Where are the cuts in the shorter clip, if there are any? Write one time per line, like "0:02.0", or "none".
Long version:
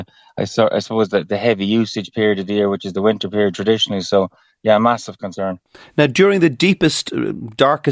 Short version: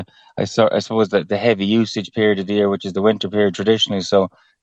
none